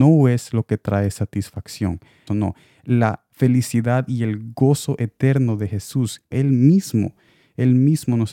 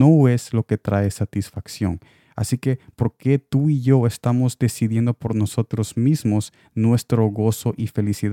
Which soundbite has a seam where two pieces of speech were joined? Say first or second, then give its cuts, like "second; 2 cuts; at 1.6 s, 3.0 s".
first; 2 cuts; at 2.3 s, 6.3 s